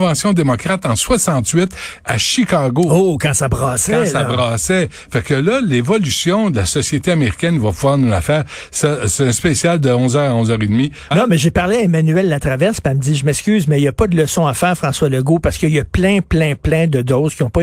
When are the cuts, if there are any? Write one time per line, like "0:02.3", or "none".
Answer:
0:11.1